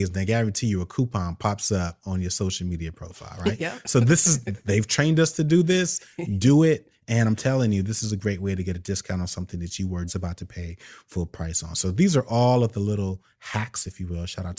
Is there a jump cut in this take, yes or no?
yes